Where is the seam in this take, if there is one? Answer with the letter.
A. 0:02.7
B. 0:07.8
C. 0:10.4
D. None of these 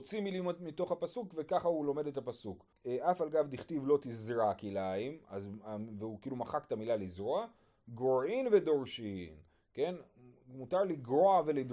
A